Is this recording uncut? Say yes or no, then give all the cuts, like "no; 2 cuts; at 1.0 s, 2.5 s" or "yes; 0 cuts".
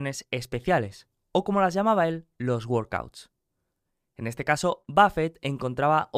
yes; 0 cuts